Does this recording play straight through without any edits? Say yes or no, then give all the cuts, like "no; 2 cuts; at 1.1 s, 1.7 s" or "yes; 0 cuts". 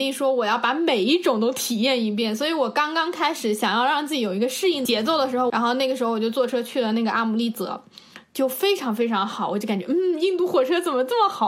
no; 1 cut; at 5.5 s